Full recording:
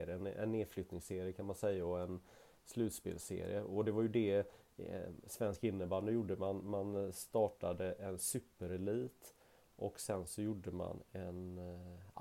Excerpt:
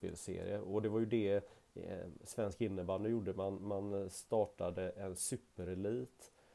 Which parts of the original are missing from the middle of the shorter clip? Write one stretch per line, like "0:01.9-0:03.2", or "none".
none